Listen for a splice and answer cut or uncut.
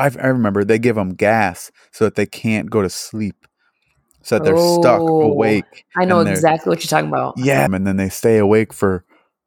cut